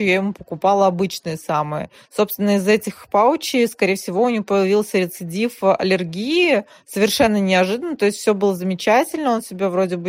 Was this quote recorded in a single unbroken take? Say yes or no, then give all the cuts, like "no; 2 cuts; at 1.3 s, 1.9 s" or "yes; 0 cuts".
yes; 0 cuts